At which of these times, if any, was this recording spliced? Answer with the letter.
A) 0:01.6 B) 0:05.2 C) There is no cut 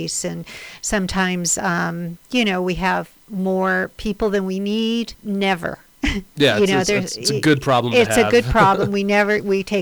B